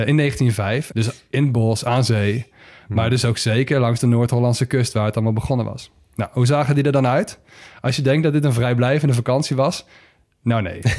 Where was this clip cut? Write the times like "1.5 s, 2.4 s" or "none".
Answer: 0.9 s